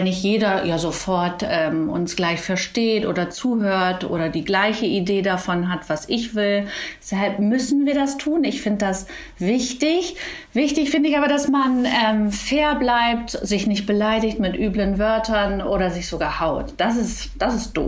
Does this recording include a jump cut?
no; 0 cuts

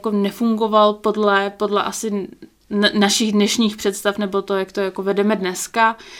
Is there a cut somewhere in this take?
no; 0 cuts

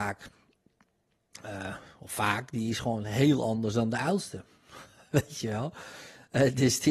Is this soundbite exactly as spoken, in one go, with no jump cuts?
yes; 0 cuts

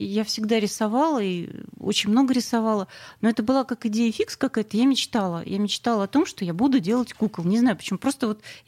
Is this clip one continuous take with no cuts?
yes; 0 cuts

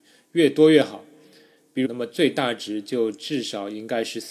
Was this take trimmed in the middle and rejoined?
yes; 1 cut; at 1.8 s

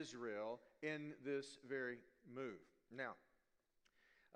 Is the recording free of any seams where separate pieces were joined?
yes; 0 cuts

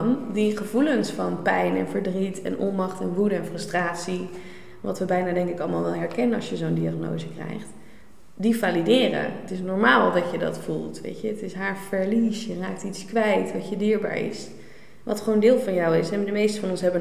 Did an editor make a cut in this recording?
no; 0 cuts

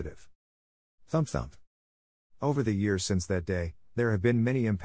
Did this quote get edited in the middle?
no; 0 cuts

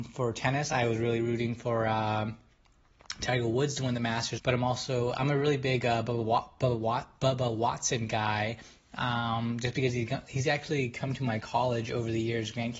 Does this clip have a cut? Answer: yes; 1 cut; at 4.4 s

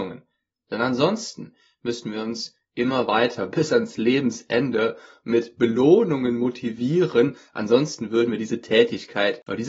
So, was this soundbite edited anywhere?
no; 0 cuts

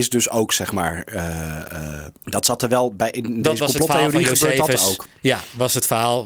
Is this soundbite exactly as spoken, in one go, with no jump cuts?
no; 1 cut; at 2.2 s

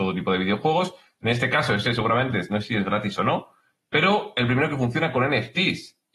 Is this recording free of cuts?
yes; 0 cuts

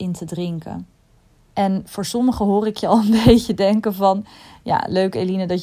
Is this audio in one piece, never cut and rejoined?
yes; 0 cuts

